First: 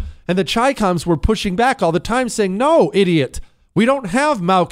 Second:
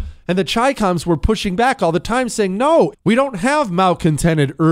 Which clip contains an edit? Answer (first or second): second